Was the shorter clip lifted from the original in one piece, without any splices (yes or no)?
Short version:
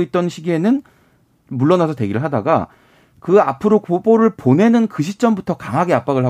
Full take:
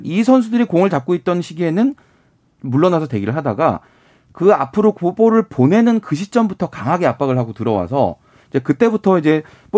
yes